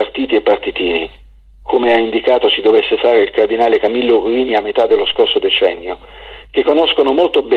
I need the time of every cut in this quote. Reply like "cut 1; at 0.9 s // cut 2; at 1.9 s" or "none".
none

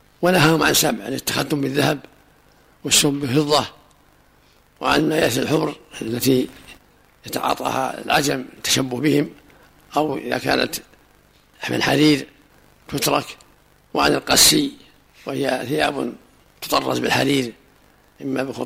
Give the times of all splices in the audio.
none

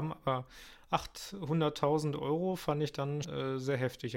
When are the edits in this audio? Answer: cut 1; at 3.2 s

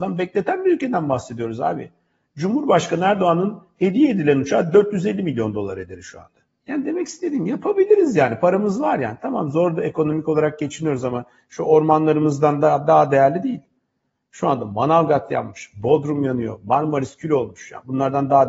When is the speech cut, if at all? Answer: none

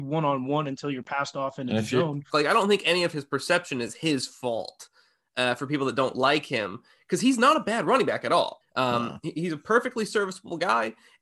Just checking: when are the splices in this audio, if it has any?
cut 1; at 2.3 s // cut 2; at 8.6 s

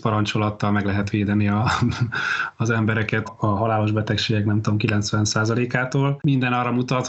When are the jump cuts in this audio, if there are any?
cut 1; at 3.3 s

